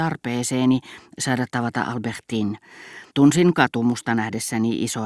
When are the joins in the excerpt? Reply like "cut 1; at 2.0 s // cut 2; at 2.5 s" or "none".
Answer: cut 1; at 3.1 s